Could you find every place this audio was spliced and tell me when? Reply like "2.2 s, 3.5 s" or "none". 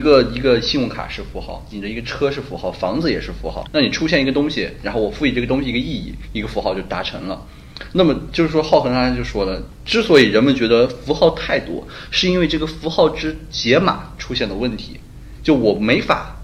3.6 s

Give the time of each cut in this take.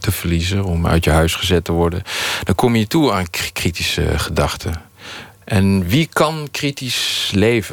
5.3 s

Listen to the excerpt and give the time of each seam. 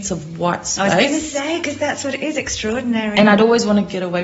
none

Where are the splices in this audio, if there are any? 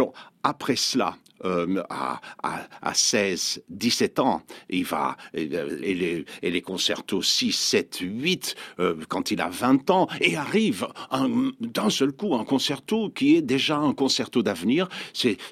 5.8 s

